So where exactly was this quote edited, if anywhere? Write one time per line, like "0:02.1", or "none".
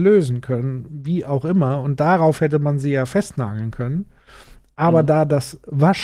none